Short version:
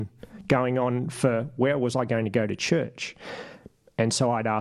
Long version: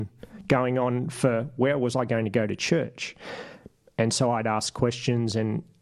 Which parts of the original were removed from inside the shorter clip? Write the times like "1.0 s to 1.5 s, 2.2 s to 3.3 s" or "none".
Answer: none